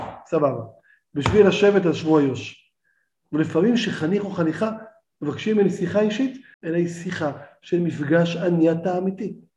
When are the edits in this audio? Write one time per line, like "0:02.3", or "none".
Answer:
0:06.5